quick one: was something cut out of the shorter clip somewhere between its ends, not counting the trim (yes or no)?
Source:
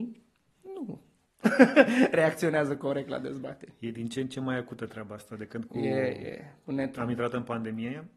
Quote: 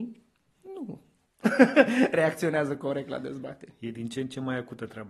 no